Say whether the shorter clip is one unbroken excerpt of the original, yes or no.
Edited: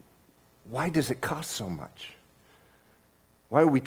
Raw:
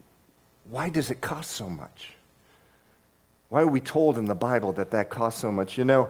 yes